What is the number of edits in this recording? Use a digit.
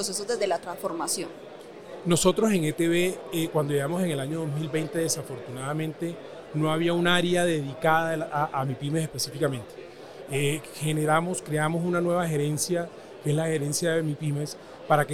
1